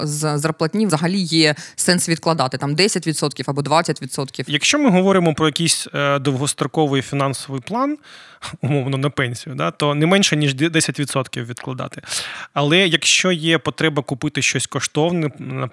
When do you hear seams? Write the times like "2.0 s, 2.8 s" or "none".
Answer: none